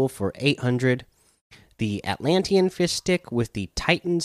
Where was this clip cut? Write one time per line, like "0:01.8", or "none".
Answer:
none